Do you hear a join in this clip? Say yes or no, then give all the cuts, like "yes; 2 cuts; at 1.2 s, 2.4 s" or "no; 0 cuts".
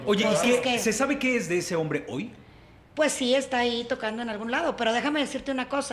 no; 0 cuts